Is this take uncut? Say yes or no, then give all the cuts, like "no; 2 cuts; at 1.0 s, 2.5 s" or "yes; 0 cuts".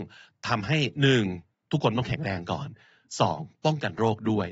yes; 0 cuts